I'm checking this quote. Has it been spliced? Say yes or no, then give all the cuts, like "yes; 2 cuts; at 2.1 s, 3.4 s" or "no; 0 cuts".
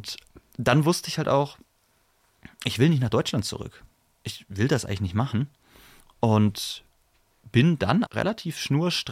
yes; 1 cut; at 8.0 s